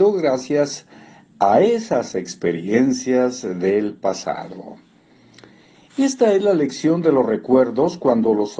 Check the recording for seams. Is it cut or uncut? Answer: uncut